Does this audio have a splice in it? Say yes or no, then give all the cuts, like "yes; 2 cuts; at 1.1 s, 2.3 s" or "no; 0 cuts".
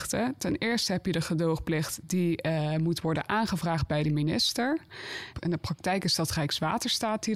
yes; 1 cut; at 5.3 s